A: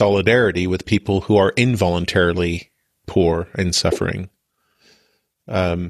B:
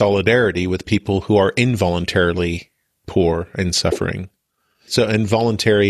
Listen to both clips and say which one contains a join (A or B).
B